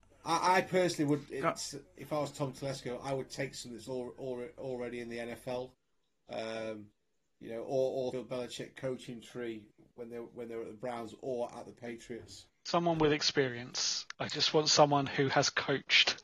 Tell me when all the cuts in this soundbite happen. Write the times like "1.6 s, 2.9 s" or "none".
8.1 s

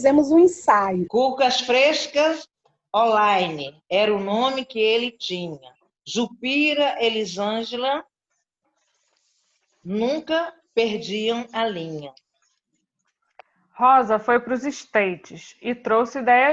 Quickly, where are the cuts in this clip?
1.1 s

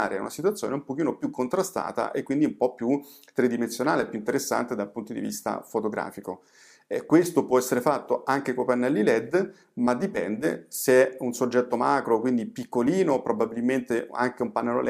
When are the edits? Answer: none

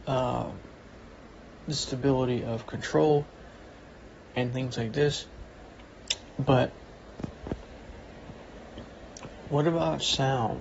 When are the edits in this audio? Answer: none

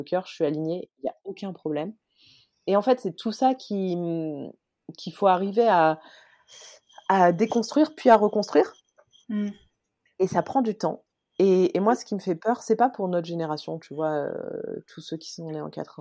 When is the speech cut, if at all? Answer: none

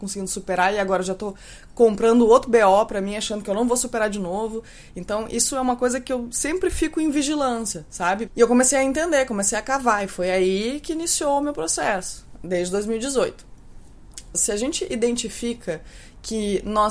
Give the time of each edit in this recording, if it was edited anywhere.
8.3 s, 14.3 s

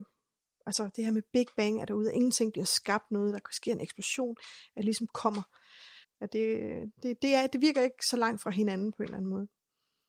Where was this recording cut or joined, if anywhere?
6.0 s

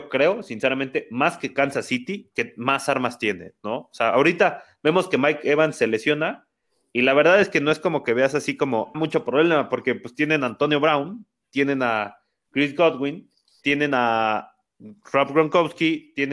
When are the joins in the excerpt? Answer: 8.9 s, 13.6 s

